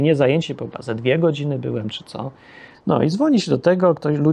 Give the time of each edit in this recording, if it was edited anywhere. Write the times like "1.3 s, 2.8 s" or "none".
2.7 s